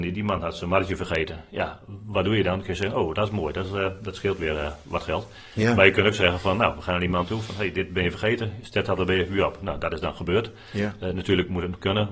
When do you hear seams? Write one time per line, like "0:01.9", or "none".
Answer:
none

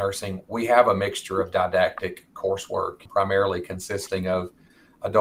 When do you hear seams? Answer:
0:03.1

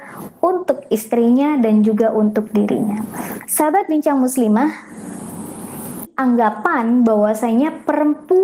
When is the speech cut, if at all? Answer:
0:03.5
0:06.1

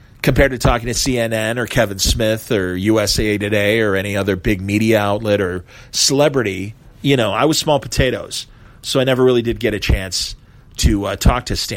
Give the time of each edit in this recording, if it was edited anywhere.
none

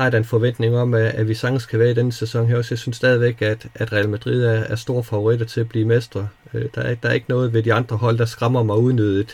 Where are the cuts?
none

